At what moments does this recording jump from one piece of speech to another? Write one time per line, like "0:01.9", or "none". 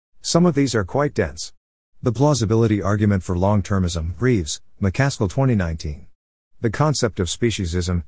0:06.4